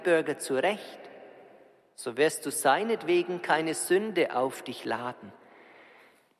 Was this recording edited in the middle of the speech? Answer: no; 0 cuts

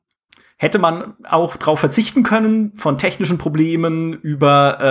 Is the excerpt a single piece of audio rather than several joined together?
yes; 0 cuts

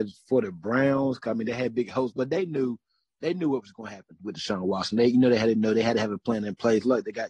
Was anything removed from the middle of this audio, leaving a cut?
no; 0 cuts

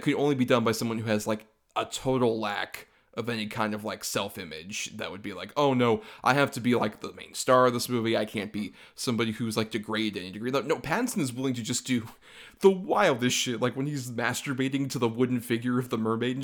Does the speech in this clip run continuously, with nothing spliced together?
yes; 0 cuts

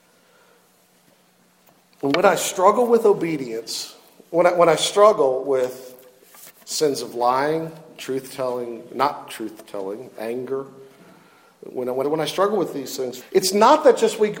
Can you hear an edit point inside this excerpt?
yes; 2 cuts; at 12.0 s, 13.2 s

